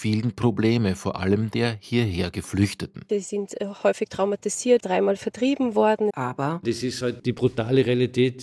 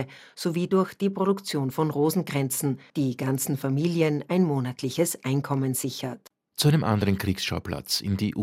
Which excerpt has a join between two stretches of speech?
first; 2 cuts; at 4.8 s, 6.1 s

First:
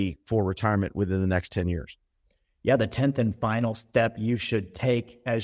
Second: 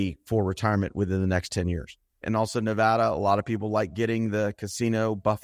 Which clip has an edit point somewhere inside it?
second; 1 cut; at 2.2 s

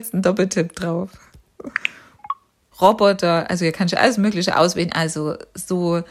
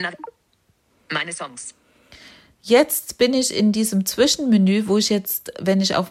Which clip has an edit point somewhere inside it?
first; 2 cuts; at 2.7 s, 4.9 s

